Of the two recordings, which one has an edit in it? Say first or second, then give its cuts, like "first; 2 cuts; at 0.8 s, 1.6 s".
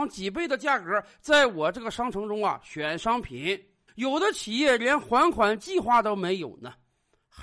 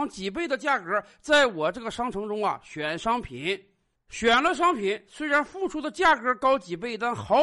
first; 1 cut; at 3.9 s